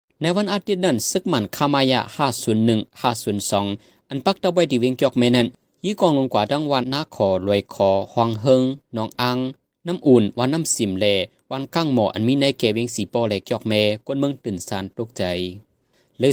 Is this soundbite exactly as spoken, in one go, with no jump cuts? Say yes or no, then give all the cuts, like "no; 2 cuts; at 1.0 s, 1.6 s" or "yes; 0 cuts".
no; 1 cut; at 6.8 s